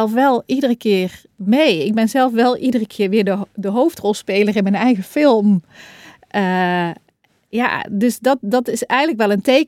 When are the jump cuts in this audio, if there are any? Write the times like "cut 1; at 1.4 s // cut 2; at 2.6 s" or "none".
none